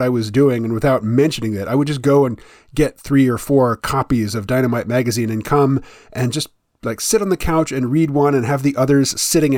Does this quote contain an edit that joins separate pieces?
no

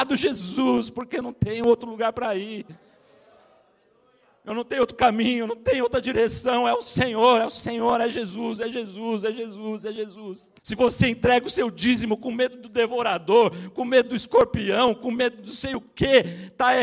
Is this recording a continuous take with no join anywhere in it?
no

